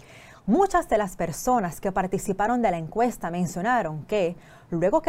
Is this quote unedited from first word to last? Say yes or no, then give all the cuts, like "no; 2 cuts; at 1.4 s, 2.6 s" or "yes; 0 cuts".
yes; 0 cuts